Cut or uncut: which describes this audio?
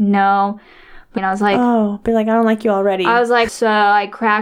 cut